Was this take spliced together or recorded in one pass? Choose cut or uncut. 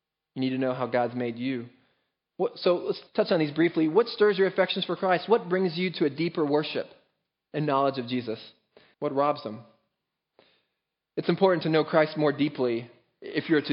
cut